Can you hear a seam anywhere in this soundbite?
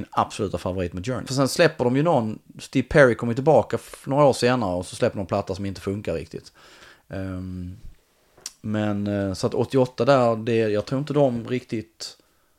yes; 1 cut; at 1.3 s

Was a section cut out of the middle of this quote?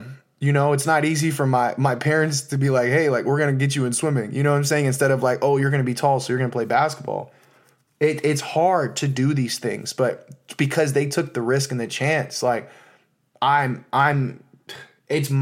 no; 0 cuts

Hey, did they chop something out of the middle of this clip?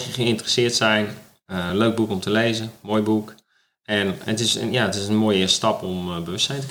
no; 0 cuts

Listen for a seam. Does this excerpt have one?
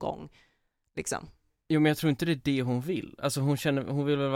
no; 0 cuts

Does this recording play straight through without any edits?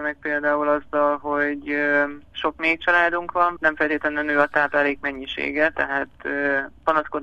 no; 2 cuts; at 2.3 s, 3.6 s

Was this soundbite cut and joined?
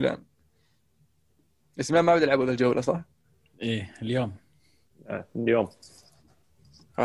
no; 0 cuts

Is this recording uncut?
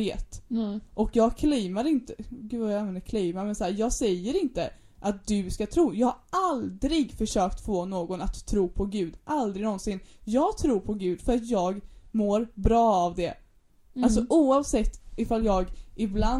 yes; 0 cuts

